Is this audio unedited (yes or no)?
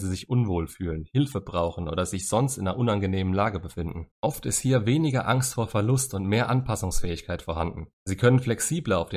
no